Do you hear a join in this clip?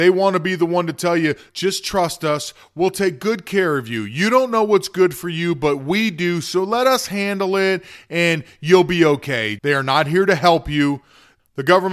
yes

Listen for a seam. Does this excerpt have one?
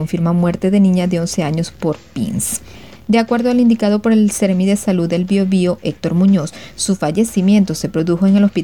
yes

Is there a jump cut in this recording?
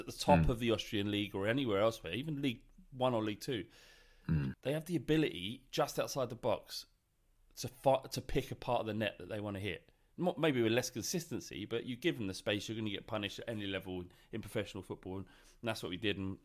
no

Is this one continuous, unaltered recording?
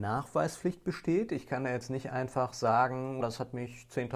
no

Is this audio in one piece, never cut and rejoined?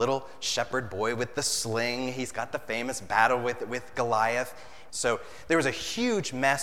no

